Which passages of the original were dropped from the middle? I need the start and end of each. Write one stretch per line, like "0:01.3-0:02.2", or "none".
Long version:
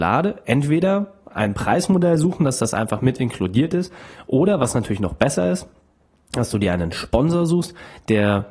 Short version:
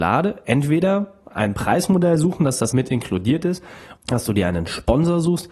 0:02.7-0:03.0
0:04.3-0:06.2